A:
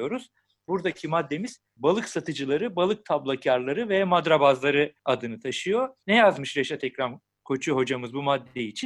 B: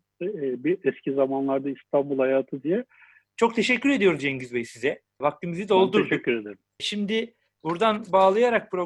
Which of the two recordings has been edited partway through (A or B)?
B